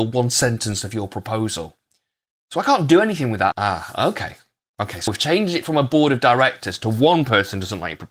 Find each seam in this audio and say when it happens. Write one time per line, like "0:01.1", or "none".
0:03.5
0:05.1